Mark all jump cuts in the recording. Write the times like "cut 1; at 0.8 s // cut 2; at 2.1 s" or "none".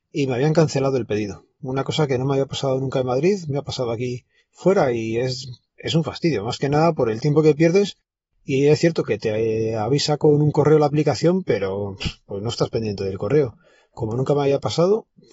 none